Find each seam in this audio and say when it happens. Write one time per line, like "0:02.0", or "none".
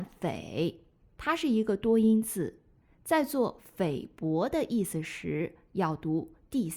none